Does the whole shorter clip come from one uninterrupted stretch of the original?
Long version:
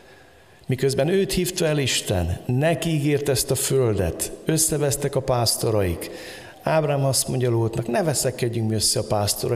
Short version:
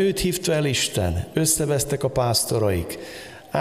no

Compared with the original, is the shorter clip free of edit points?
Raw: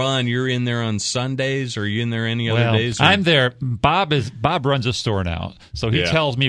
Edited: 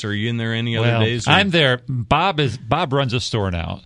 yes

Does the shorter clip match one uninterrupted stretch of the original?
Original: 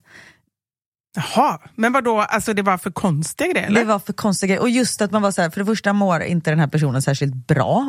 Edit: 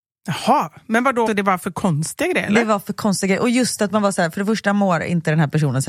no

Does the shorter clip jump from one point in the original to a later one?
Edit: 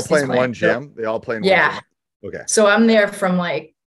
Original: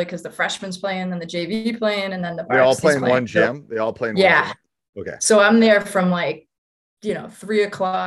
no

